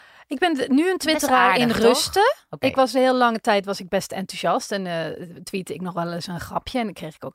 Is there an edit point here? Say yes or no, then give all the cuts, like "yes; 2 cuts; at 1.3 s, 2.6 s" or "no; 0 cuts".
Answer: no; 0 cuts